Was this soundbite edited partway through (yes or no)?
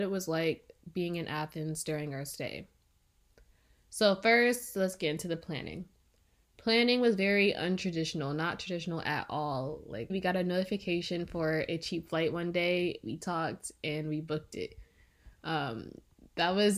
yes